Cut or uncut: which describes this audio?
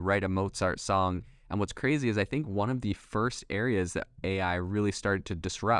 uncut